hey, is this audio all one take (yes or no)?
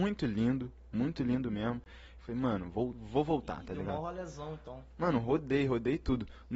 no